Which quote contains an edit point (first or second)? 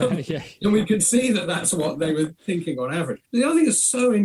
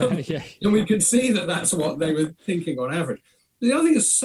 first